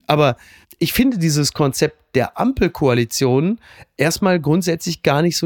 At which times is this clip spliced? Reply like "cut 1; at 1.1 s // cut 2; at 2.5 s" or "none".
none